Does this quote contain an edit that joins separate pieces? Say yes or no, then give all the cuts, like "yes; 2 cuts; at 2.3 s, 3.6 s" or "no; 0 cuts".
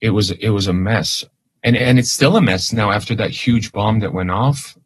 no; 0 cuts